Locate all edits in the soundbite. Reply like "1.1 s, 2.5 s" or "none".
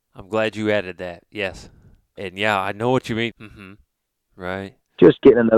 2.2 s, 3.3 s

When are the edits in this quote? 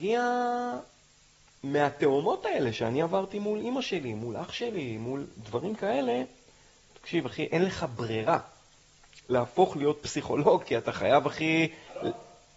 6.9 s, 9.2 s

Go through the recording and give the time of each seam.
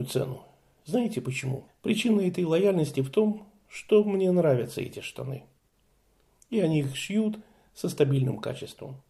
1.7 s

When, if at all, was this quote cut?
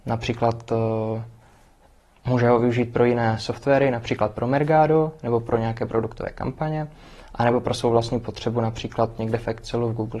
none

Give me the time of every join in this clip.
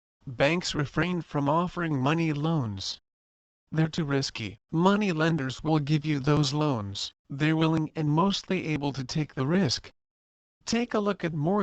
4.6 s, 7.2 s

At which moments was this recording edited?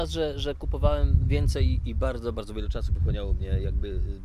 2.3 s

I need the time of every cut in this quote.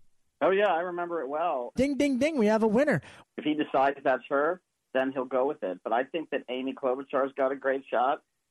1.8 s, 3.2 s

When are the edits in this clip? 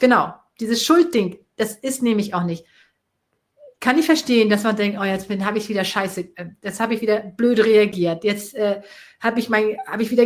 none

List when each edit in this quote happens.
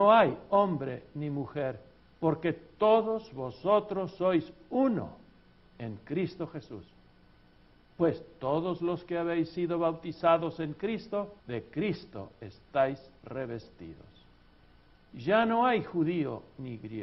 11.4 s, 15.0 s

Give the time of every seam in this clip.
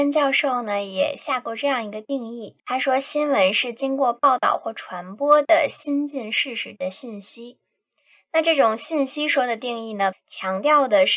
2.6 s, 10.1 s

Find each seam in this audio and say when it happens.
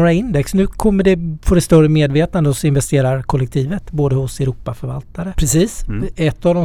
5.3 s

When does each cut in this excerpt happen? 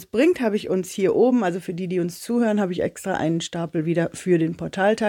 none

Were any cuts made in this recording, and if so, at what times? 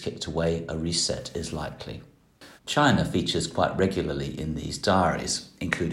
2.6 s

